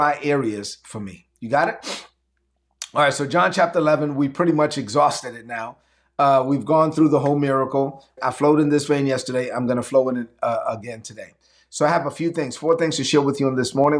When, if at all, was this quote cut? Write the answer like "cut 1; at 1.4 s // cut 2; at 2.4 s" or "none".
cut 1; at 8.2 s